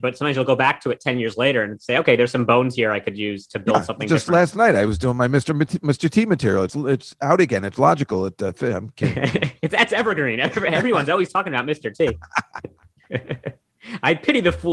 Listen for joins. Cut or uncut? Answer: cut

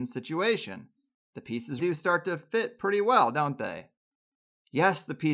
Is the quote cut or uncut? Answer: cut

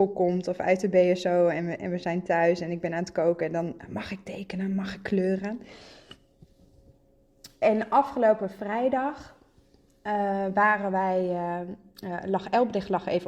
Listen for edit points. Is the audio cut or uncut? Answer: uncut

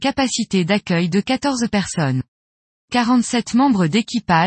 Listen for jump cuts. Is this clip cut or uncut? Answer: uncut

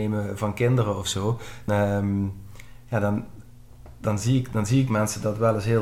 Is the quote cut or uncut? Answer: cut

